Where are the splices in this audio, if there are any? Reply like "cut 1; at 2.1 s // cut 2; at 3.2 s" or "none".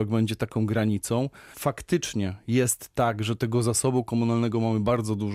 cut 1; at 1.5 s